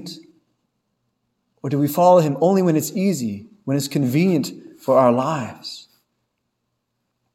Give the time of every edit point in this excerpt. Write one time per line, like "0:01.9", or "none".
none